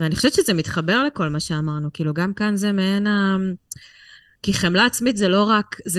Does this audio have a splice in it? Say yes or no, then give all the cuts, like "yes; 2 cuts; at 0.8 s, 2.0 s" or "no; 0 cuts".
no; 0 cuts